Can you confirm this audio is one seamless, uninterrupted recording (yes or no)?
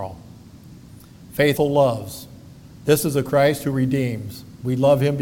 no